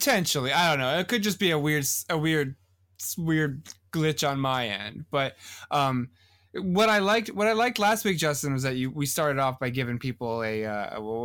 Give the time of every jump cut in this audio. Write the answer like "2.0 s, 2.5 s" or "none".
none